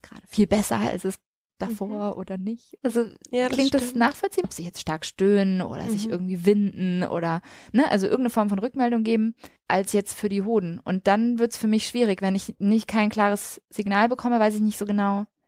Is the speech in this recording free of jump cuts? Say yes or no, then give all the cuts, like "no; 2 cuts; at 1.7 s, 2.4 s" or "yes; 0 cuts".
no; 2 cuts; at 2.8 s, 4.4 s